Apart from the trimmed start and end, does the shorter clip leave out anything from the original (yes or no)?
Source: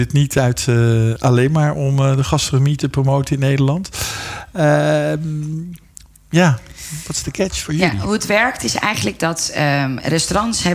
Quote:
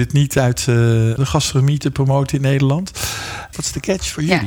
yes